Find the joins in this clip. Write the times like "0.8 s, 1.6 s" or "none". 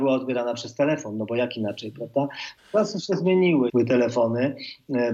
2.6 s, 3.7 s

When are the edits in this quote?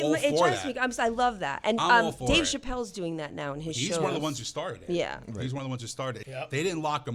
6.2 s

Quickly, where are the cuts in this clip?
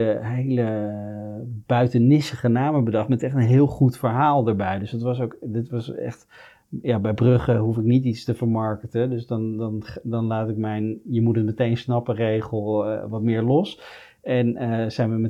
none

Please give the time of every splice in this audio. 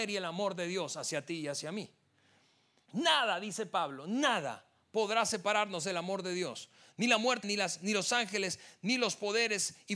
2.9 s, 7.4 s

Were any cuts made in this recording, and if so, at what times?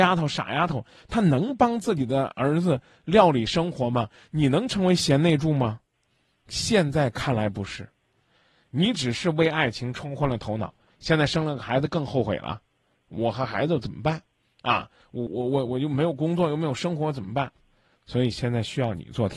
15.3 s

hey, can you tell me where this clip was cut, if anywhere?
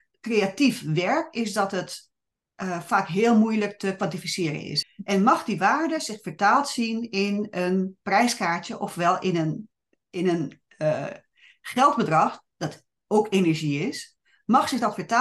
4.8 s

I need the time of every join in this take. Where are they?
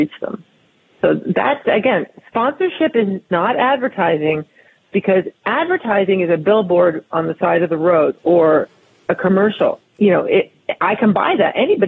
8.2 s, 9.8 s

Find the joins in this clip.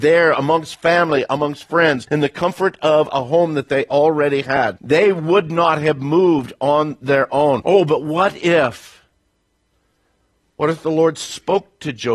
none

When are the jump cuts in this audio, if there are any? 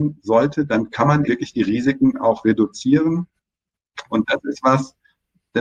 1.3 s, 4.1 s

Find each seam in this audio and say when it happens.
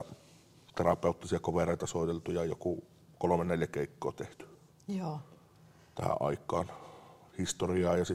none

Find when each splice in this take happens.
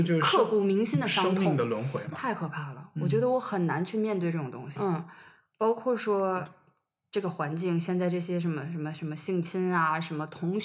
4.8 s

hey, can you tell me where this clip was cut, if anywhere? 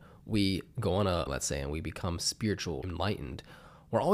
1.3 s, 2.8 s

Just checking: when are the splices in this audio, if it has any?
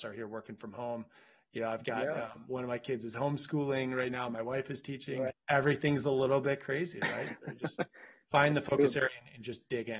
5.3 s

